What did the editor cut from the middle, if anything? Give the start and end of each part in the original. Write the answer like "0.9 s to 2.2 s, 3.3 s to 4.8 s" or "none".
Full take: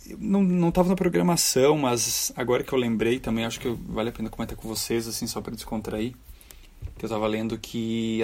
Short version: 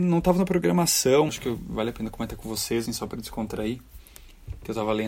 1.8 s to 3.5 s, 5.0 s to 5.2 s